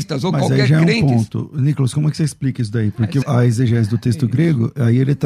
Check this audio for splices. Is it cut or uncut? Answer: cut